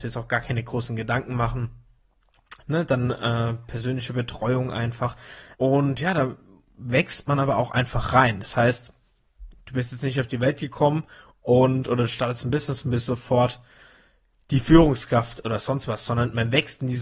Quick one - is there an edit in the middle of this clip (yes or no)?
yes